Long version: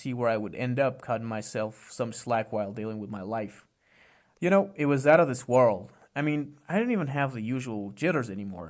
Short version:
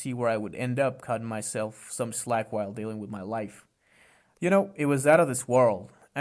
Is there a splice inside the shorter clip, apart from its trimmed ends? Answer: no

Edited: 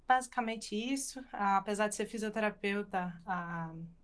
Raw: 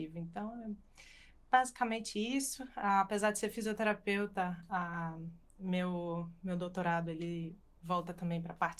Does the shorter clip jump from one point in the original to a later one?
no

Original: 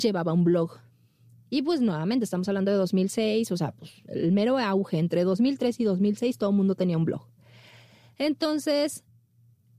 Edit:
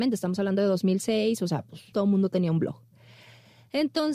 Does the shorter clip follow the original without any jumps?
no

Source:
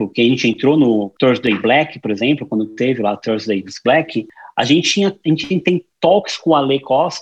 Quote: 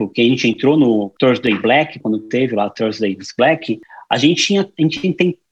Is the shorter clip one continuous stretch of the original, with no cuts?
no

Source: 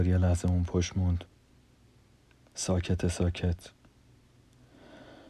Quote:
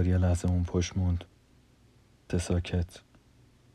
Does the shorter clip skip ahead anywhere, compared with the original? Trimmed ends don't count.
yes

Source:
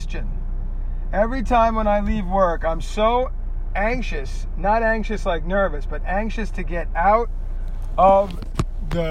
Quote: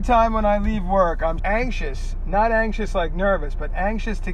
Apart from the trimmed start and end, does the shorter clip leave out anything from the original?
yes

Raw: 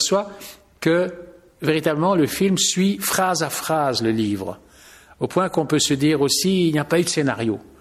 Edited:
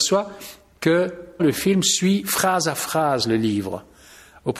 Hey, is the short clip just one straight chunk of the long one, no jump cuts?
no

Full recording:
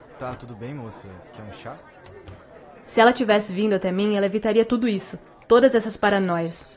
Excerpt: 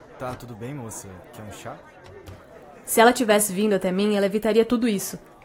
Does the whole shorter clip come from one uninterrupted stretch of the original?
yes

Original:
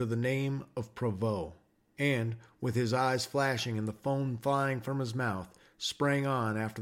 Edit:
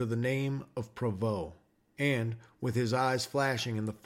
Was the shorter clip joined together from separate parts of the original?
no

